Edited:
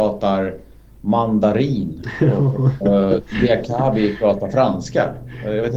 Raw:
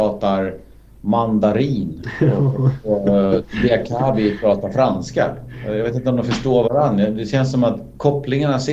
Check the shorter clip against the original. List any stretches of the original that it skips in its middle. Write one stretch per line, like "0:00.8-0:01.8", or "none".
0:02.8-0:03.0